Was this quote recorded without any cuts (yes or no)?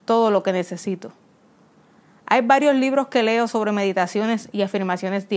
yes